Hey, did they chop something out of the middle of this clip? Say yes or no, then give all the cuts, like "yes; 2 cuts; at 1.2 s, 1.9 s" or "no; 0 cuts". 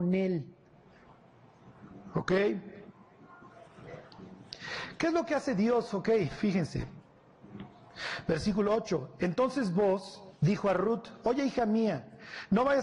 no; 0 cuts